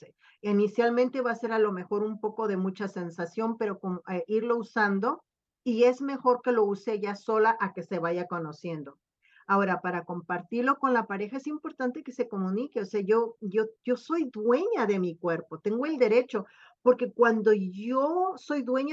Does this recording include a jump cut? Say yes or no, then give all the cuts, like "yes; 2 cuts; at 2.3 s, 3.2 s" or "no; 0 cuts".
no; 0 cuts